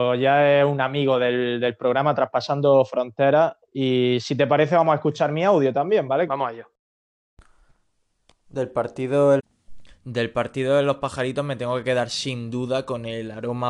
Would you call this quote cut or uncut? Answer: cut